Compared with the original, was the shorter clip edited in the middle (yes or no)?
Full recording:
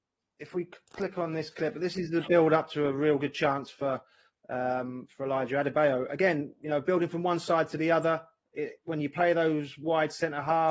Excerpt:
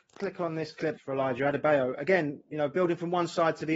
yes